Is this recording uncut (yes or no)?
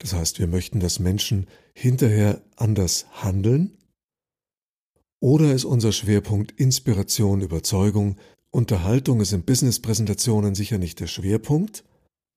no